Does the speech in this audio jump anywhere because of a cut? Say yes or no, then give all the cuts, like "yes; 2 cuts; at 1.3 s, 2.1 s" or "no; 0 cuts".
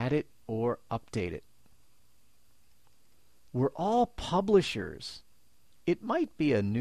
yes; 2 cuts; at 3.4 s, 5.8 s